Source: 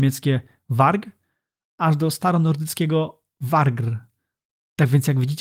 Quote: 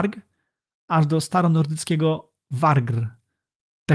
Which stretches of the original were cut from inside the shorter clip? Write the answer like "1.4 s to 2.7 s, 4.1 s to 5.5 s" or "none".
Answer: none